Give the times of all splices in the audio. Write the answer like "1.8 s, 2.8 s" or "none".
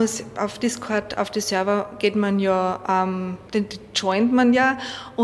3.5 s

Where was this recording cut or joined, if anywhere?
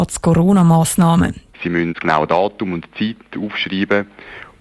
1.5 s

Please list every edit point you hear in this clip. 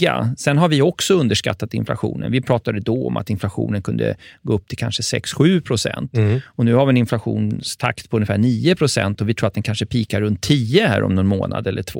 none

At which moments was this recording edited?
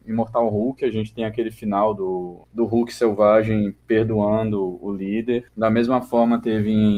2.4 s, 5.5 s

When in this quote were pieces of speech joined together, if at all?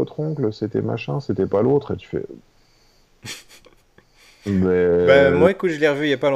none

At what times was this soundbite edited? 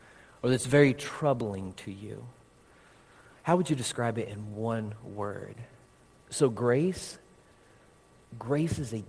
6.2 s

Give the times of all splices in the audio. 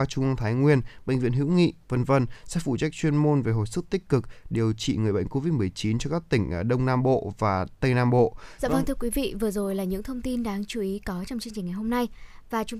8.6 s

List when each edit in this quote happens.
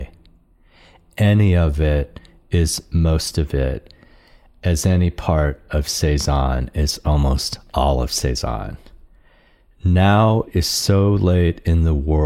none

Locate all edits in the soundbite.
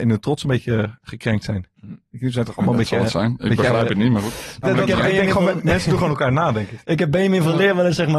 4.6 s

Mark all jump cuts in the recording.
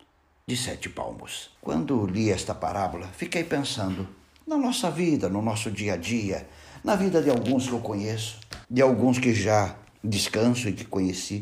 1.6 s, 8.6 s

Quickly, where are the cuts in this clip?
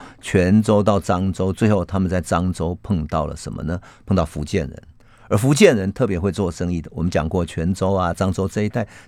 none

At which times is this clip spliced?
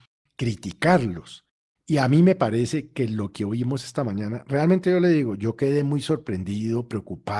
none

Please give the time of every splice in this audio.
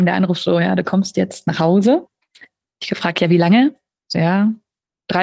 none

